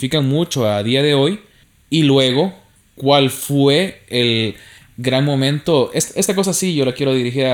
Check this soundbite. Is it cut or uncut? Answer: uncut